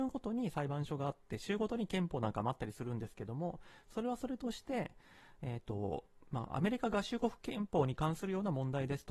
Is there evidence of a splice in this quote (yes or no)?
no